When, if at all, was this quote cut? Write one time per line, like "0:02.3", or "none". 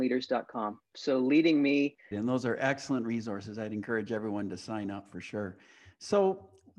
0:00.9
0:02.1

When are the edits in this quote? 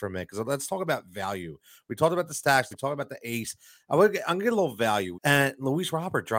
0:02.7
0:05.1

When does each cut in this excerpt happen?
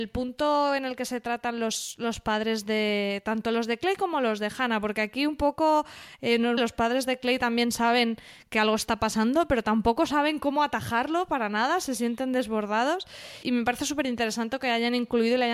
0:06.6
0:13.4

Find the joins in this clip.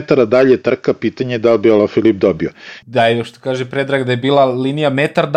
0:02.8

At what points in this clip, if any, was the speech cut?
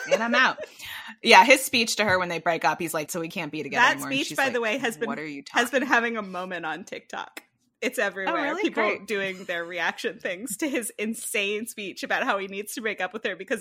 0:03.1

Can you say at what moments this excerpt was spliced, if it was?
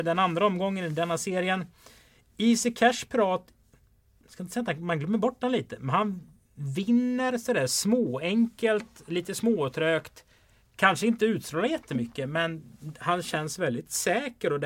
none

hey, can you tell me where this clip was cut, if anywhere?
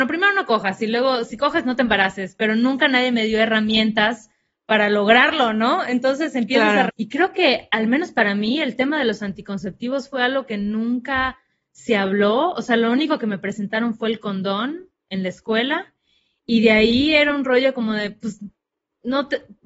0:06.9

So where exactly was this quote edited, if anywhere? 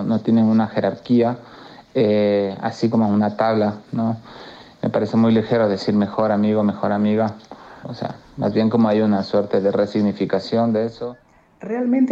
0:07.8

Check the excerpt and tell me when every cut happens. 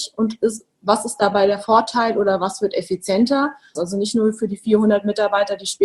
0:03.7

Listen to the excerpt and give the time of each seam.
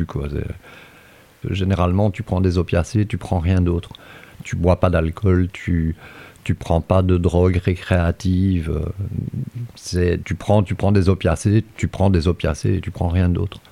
0:01.4
0:05.5
0:10.2

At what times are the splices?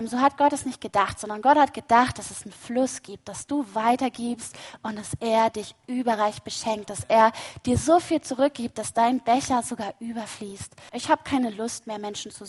0:10.9

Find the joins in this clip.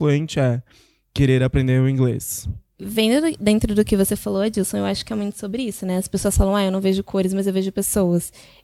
none

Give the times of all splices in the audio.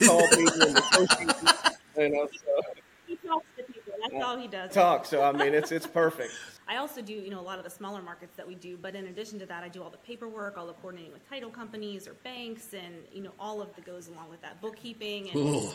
0:04.7
0:06.6
0:13.7

